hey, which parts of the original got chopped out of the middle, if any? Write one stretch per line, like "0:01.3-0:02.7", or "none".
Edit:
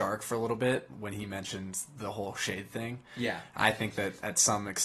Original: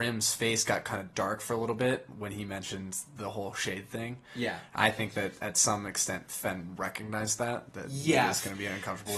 none